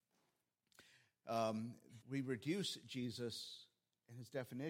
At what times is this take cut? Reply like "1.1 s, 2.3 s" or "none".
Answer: 2.0 s

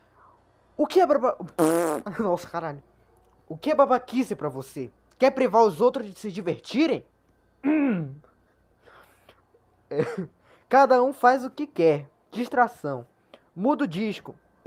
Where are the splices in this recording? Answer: none

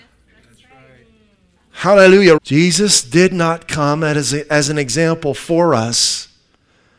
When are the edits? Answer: 2.4 s

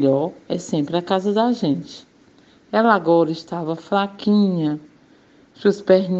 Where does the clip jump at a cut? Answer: none

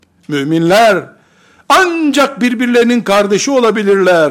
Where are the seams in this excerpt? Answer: none

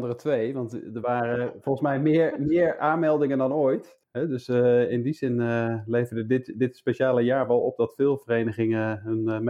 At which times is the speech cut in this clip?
4.0 s

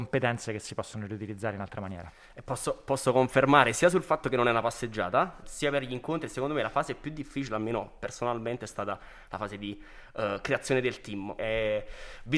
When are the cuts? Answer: 5.4 s, 11.4 s

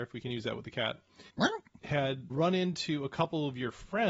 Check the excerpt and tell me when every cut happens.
1.3 s, 2.3 s

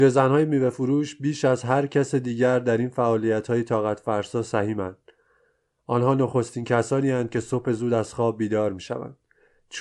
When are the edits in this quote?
none

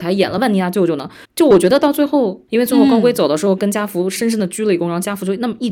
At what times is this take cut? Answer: 1.2 s, 2.5 s

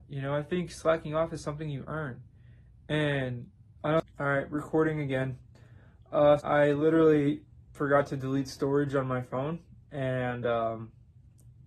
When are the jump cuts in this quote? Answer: 4.1 s, 6.4 s

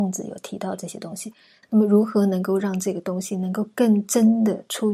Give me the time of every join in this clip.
1.6 s

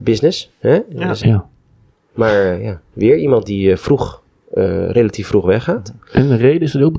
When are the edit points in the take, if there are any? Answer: 1.2 s, 2.9 s

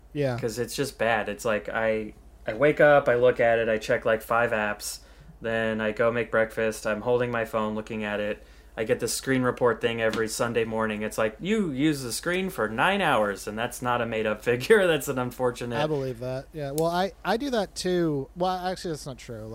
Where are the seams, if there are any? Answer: none

